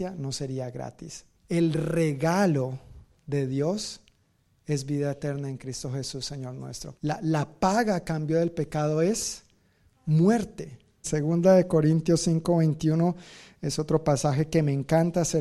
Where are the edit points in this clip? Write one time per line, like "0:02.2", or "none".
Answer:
0:01.3
0:06.9
0:11.0